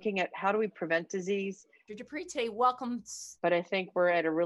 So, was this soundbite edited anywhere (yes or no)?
yes